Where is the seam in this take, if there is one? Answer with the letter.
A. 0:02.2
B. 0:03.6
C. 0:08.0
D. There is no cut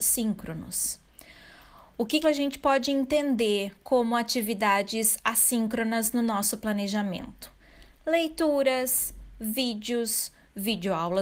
A